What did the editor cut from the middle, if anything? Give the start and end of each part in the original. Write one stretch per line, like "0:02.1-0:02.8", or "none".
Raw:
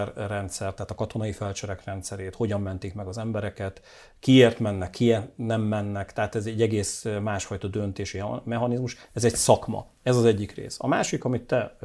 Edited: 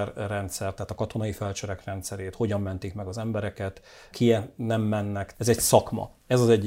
0:04.1-0:04.9
0:06.1-0:09.1